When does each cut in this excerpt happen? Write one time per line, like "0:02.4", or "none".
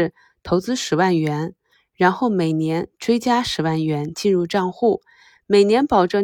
none